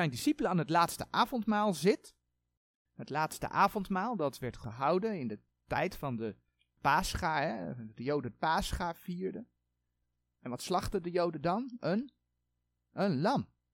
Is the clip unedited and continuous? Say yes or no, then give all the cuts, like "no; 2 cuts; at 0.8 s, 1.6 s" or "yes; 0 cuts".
yes; 0 cuts